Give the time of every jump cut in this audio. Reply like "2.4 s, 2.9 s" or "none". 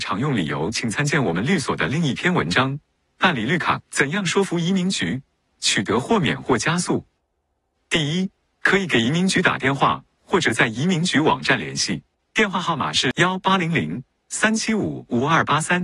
3.8 s